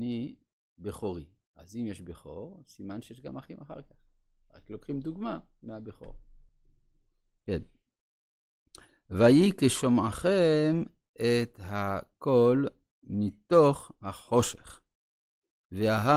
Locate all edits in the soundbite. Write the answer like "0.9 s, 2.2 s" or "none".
none